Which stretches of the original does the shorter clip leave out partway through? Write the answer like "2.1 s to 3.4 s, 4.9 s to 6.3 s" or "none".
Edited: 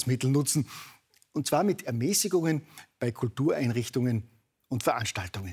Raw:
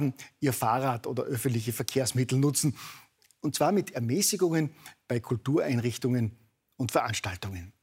none